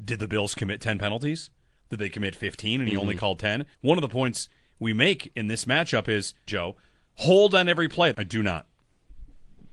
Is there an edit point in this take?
yes; 3 cuts; at 3.7 s, 6.5 s, 8.1 s

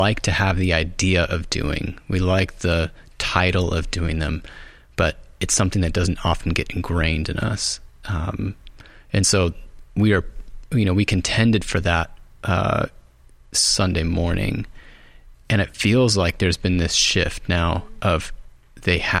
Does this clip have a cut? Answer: no; 0 cuts

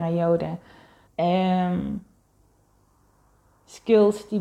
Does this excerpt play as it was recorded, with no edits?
no; 1 cut; at 1.1 s

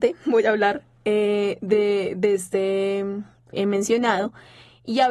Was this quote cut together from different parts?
yes; 1 cut; at 3.5 s

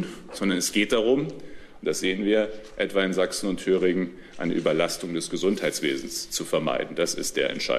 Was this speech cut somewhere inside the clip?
no; 0 cuts

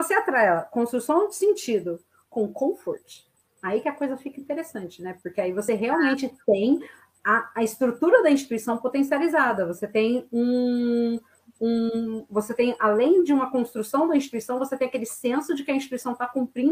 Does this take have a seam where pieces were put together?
no; 0 cuts

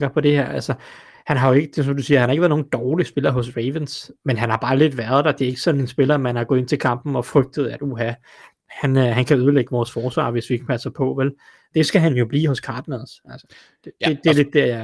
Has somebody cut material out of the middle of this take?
no; 0 cuts

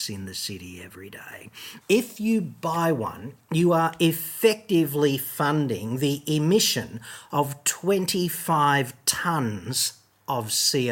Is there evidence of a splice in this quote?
yes; 1 cut; at 1.8 s

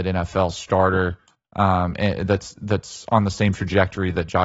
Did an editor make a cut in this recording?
no; 0 cuts

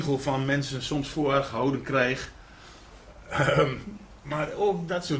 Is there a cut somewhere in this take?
no; 0 cuts

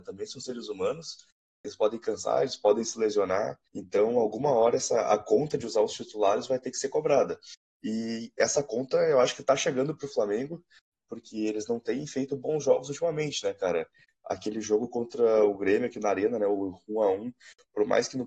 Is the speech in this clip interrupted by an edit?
yes; 1 cut; at 3.7 s

